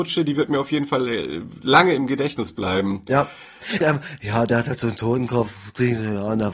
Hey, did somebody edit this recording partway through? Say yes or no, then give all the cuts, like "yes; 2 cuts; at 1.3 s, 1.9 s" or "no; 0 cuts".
yes; 1 cut; at 3.8 s